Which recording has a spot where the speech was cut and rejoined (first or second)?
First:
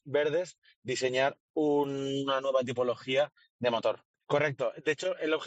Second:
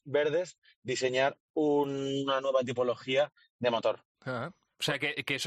first